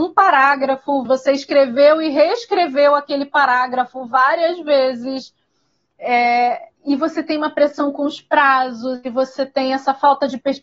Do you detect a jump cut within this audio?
yes; 2 cuts; at 1.0 s, 6.8 s

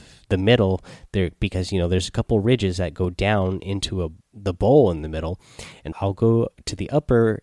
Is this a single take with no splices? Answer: no; 2 cuts; at 4.2 s, 5.9 s

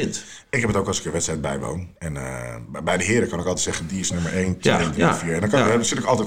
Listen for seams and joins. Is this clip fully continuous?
yes; 0 cuts

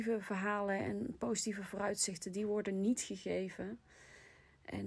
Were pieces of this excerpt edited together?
no; 0 cuts

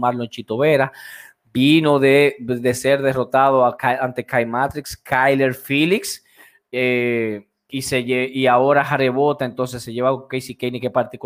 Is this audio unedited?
yes; 0 cuts

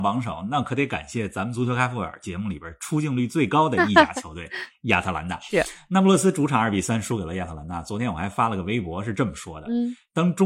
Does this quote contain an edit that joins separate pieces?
no; 0 cuts

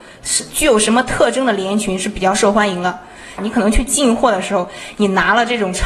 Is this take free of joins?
no; 1 cut; at 3.4 s

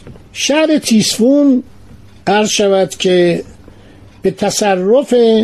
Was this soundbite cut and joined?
no; 0 cuts

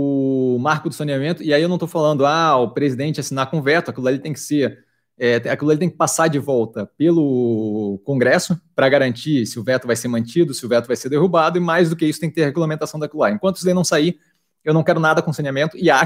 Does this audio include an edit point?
no; 0 cuts

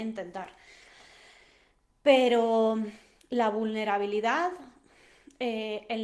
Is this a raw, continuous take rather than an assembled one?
yes; 0 cuts

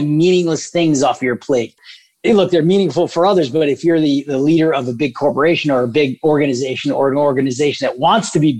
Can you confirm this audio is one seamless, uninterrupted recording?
yes; 0 cuts

